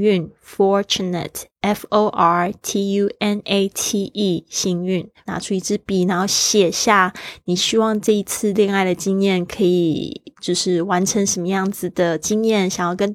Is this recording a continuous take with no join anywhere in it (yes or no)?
no